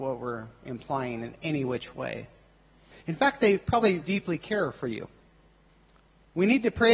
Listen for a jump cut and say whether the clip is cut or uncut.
cut